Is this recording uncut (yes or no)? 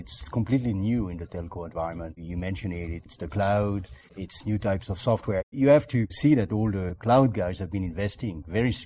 yes